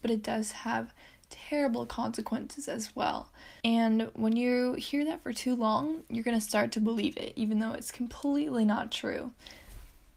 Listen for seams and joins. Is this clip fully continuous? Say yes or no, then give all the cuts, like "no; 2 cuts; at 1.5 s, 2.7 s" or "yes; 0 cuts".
no; 1 cut; at 3.6 s